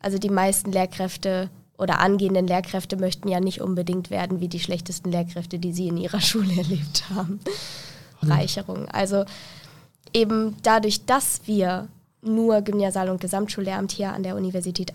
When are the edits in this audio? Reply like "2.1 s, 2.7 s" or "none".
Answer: 8.2 s